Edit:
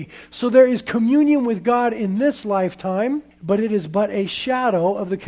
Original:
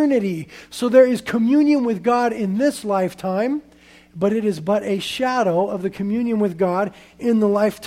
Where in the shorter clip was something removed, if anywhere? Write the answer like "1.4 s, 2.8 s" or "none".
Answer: 3.3 s